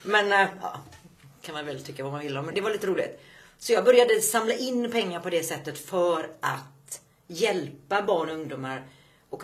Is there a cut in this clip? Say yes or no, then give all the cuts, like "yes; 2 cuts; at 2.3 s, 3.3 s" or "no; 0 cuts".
yes; 1 cut; at 2.5 s